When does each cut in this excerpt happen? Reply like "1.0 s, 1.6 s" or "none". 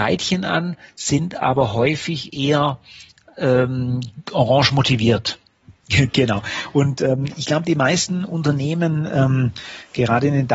5.6 s